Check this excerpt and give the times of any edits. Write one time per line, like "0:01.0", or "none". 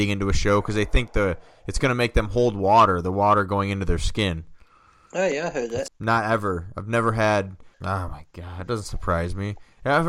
0:05.9
0:07.7